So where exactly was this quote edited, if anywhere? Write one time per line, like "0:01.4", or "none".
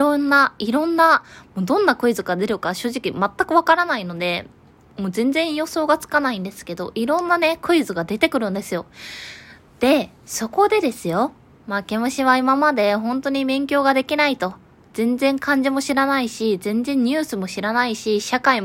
none